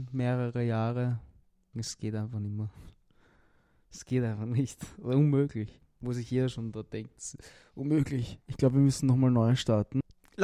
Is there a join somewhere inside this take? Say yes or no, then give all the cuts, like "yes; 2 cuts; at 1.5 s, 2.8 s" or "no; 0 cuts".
yes; 1 cut; at 1.7 s